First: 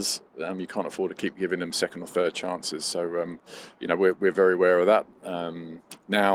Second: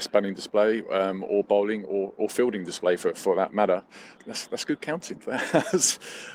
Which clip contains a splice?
second; 1 cut; at 4.2 s

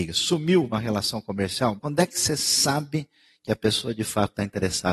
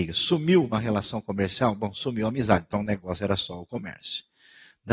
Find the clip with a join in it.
first; 1 cut; at 1.8 s

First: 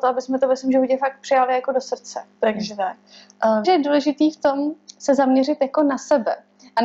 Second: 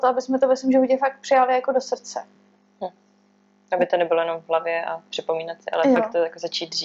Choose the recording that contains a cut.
first; 2 cuts; at 2.4 s, 3.6 s

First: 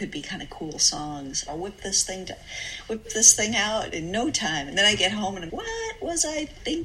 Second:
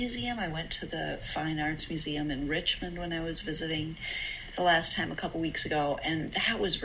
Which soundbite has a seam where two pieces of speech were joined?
first; 2 cuts; at 1.5 s, 5.5 s

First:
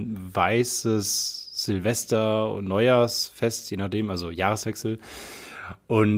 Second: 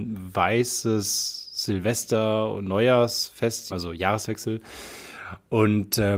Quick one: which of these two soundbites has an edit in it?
second; 1 cut; at 3.7 s

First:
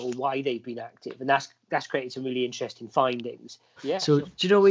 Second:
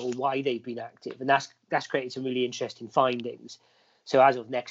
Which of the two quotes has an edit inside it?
first; 1 cut; at 3.8 s

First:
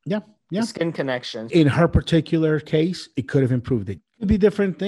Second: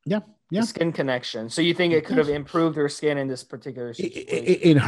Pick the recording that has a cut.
first; 2 cuts; at 1.5 s, 4.0 s

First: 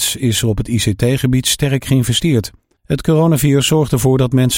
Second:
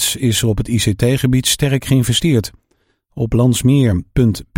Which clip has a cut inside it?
first; 1 cut; at 2.8 s

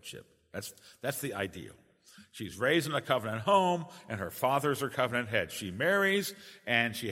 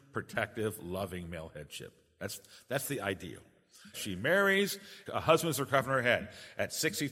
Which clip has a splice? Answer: second; 2 cuts; at 3.9 s, 5.1 s

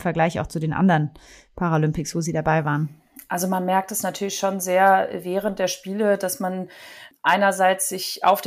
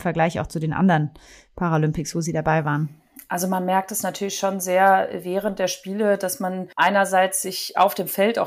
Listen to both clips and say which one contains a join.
second; 1 cut; at 6.7 s

